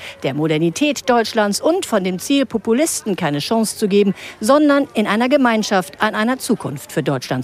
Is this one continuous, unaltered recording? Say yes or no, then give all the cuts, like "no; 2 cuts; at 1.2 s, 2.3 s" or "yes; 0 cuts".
yes; 0 cuts